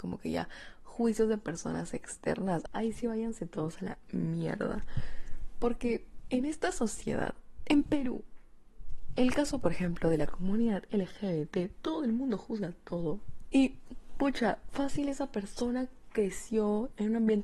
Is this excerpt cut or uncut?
cut